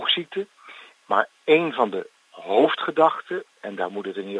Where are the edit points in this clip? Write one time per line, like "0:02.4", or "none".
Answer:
0:01.0